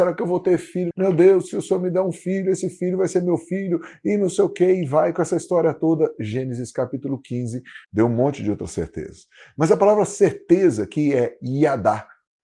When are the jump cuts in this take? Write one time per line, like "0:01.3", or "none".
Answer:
0:00.9
0:07.8